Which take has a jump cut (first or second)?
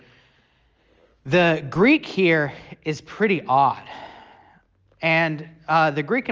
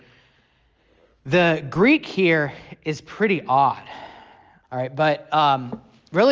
second